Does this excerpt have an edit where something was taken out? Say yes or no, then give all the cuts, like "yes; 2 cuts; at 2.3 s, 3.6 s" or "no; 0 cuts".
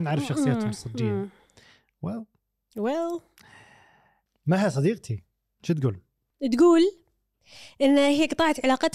no; 0 cuts